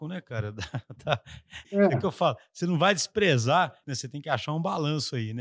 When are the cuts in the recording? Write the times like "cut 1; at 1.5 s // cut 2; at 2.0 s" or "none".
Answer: cut 1; at 1.6 s // cut 2; at 3.8 s